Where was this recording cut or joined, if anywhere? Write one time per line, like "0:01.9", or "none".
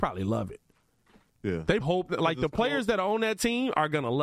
0:01.8

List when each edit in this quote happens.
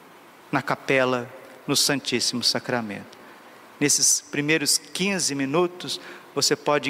none

